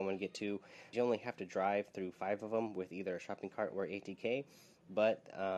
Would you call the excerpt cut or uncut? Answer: cut